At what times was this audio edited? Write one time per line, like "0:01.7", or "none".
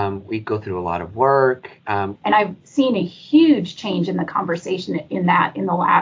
0:02.2